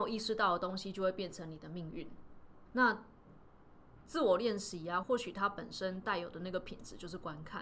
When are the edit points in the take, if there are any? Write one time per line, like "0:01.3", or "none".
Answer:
0:02.7
0:05.0